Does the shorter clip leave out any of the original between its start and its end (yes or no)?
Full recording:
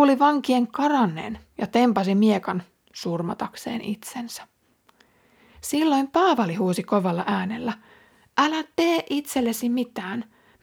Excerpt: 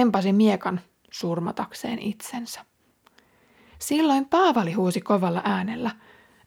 no